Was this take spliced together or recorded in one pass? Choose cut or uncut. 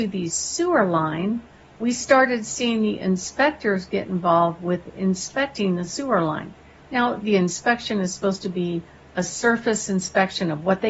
cut